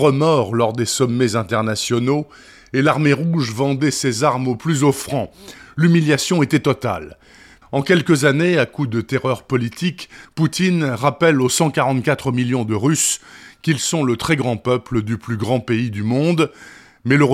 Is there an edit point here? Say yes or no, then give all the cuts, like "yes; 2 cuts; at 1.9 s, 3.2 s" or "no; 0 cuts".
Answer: yes; 2 cuts; at 7.6 s, 10.2 s